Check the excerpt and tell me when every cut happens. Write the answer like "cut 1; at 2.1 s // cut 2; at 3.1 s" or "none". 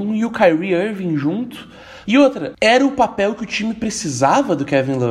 cut 1; at 2.1 s